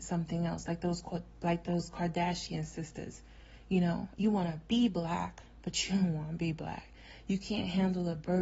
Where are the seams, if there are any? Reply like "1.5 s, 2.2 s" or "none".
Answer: 4.2 s